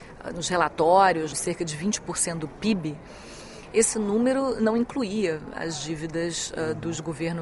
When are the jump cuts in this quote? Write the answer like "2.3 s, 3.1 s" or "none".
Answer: 1.3 s